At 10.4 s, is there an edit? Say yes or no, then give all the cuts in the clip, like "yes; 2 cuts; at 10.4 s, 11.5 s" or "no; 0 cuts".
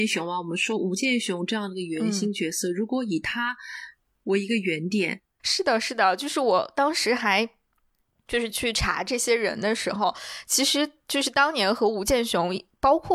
no; 2 cuts; at 5.4 s, 8.5 s